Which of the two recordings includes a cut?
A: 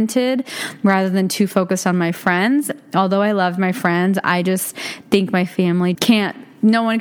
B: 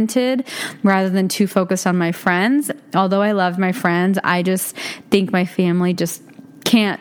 A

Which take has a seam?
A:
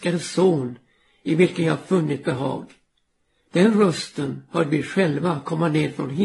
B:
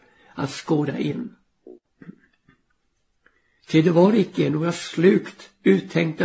B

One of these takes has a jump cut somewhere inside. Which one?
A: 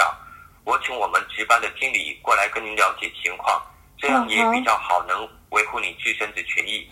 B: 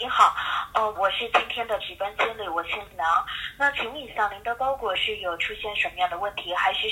B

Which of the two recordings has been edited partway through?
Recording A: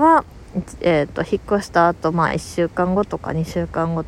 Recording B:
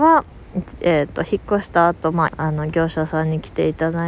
B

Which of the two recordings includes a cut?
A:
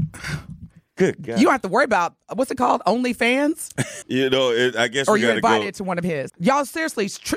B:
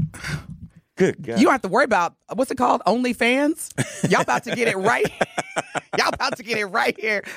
A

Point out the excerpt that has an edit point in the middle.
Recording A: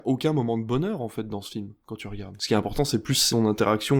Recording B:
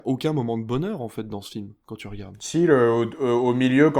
A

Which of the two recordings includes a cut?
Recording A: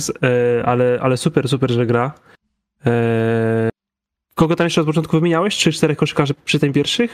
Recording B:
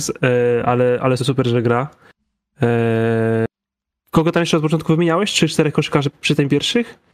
B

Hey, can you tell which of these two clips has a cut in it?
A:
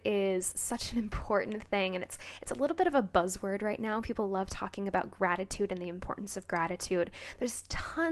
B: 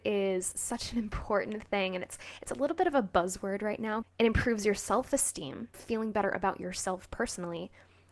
B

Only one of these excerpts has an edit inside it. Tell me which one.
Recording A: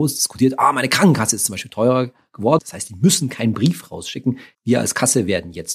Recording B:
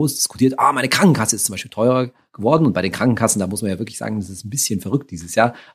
A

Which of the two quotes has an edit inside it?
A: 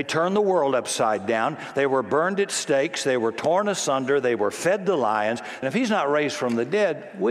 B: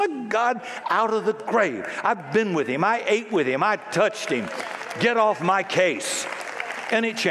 A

